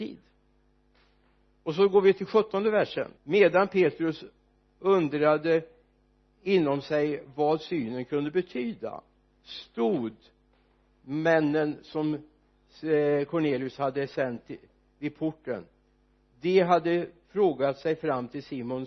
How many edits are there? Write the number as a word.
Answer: one